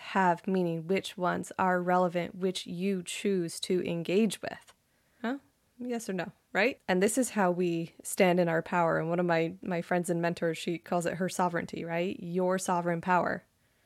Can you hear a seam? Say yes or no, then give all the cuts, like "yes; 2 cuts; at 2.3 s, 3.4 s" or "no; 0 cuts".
yes; 2 cuts; at 5.2 s, 6.8 s